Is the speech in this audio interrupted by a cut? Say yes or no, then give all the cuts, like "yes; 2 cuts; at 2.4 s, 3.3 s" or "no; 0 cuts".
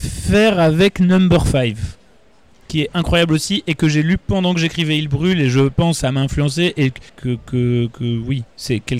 yes; 1 cut; at 7.1 s